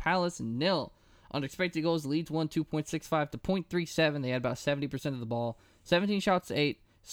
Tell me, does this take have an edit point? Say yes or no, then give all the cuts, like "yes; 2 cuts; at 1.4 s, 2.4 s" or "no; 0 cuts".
no; 0 cuts